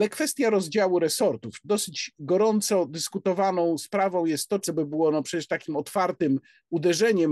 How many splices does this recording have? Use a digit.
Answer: 1